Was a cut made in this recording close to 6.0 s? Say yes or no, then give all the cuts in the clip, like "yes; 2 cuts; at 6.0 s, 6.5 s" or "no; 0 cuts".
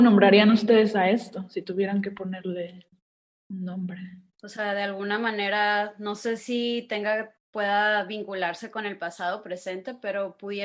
no; 1 cut; at 4.3 s